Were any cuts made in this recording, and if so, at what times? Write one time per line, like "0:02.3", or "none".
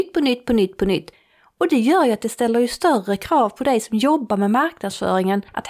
none